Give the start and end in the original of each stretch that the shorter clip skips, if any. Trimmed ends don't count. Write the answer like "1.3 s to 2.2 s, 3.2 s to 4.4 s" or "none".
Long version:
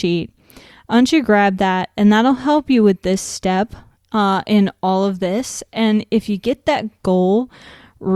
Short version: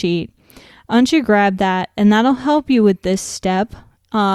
none